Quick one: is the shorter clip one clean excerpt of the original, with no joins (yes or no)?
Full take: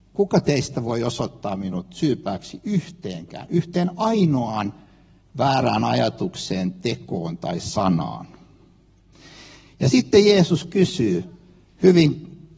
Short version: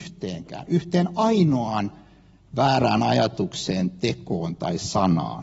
yes